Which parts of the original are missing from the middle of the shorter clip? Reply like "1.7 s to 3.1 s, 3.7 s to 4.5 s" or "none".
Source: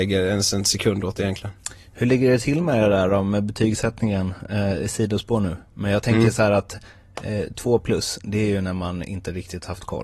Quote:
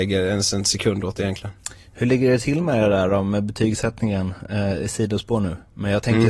none